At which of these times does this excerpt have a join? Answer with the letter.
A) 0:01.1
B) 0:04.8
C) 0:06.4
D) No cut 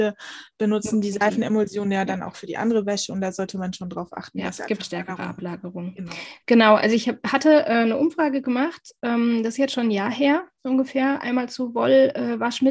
B